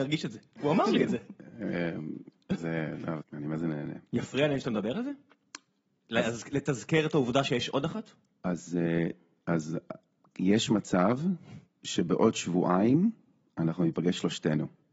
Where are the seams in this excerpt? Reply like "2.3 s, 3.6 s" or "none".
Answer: 3.2 s